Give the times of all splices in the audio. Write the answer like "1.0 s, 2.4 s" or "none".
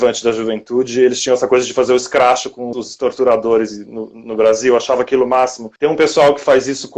2.7 s, 5.8 s